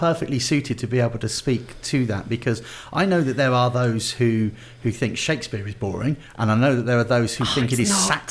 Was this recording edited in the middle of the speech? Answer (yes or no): no